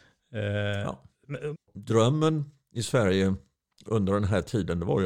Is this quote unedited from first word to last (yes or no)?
no